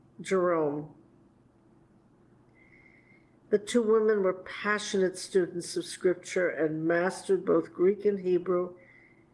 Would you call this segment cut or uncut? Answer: uncut